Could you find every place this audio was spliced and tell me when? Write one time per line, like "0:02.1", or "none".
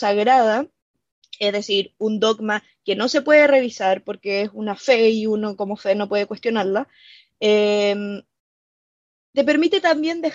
none

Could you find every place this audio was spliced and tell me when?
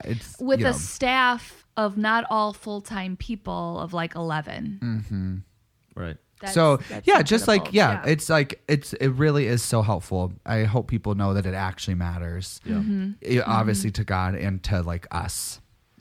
none

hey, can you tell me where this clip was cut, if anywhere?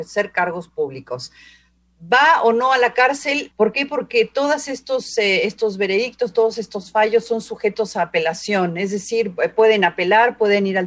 0:03.5

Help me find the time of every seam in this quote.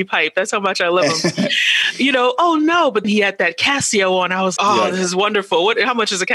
0:03.0
0:04.6

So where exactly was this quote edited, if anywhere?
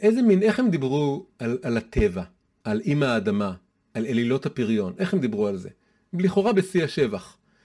0:02.6

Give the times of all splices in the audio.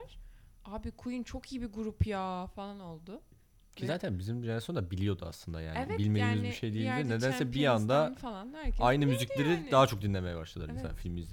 none

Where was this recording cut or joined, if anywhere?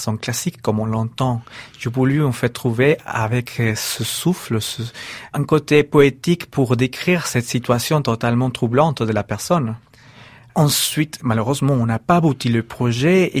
none

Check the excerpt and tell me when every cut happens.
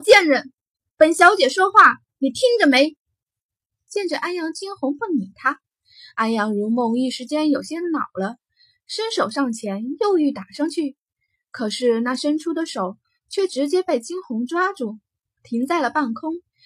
none

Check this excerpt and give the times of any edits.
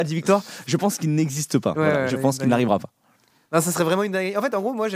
0:02.1

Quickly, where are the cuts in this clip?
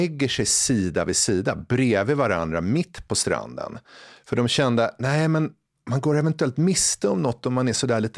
none

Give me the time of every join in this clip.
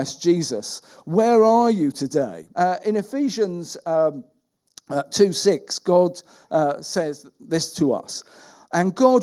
0:02.5

